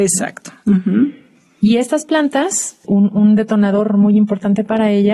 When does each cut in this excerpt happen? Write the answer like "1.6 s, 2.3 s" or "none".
2.8 s